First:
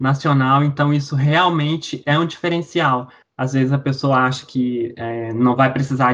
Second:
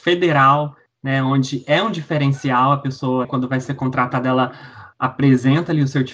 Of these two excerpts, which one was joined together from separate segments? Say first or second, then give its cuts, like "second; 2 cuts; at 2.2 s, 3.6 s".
second; 1 cut; at 3.2 s